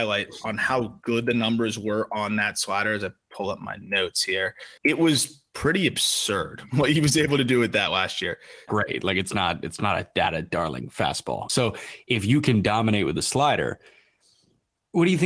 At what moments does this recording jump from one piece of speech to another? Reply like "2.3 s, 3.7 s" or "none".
4.8 s, 8.7 s, 11.5 s